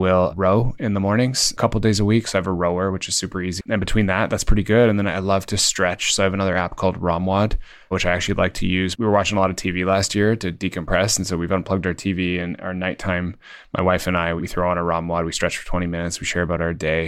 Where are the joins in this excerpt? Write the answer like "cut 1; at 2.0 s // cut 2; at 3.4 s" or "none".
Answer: cut 1; at 3.6 s

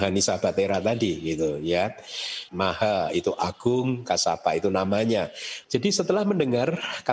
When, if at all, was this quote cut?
cut 1; at 2.5 s // cut 2; at 5.6 s

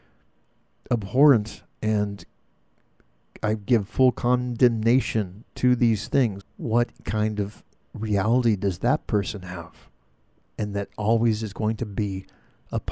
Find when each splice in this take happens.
cut 1; at 6.4 s

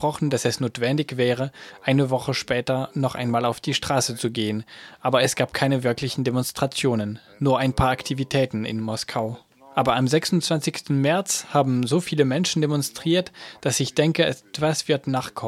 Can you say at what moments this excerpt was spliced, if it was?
none

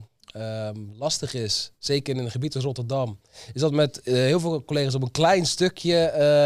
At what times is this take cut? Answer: none

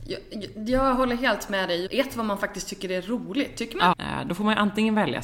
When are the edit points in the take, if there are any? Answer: cut 1; at 1.9 s // cut 2; at 3.9 s

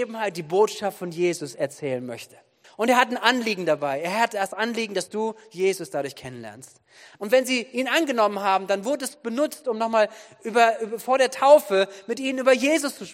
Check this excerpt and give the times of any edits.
cut 1; at 2.6 s // cut 2; at 7.1 s

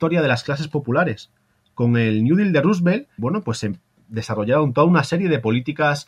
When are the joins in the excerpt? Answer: cut 1; at 3.2 s

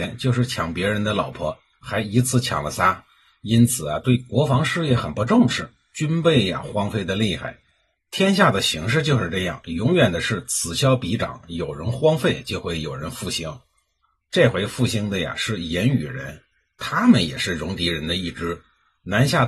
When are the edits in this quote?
none

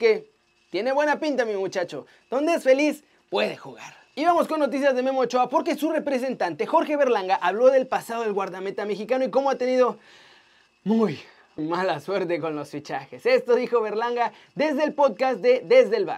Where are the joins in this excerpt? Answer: cut 1; at 11.6 s

